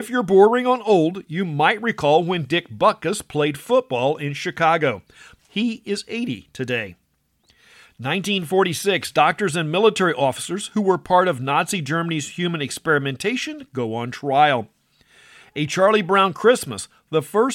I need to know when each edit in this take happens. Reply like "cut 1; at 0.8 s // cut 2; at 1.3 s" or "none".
cut 1; at 5.4 s